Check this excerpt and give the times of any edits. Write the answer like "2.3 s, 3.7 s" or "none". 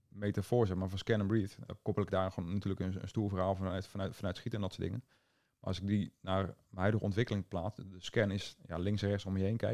1.7 s